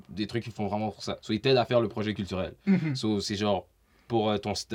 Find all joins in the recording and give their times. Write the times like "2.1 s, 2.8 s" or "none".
1.2 s